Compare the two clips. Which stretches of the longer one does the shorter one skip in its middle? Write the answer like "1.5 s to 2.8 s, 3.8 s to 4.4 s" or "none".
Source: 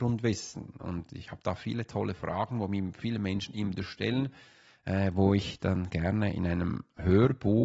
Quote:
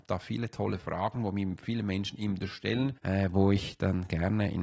4.3 s to 4.8 s